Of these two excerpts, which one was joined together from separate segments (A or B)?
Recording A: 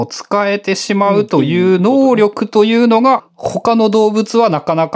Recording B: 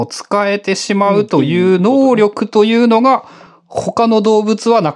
A